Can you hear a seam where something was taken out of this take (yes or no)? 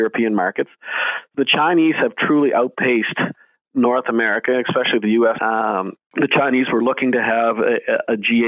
yes